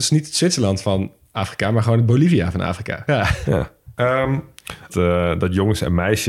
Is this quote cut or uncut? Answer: cut